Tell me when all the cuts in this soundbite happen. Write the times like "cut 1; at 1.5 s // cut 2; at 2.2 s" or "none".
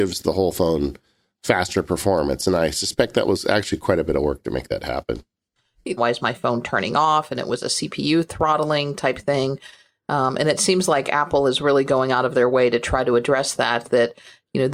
cut 1; at 6.0 s